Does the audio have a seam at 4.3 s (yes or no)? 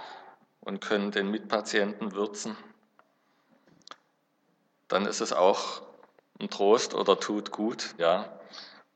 no